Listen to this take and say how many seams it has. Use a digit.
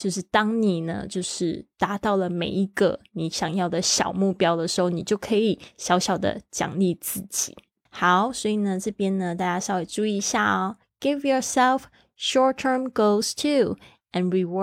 1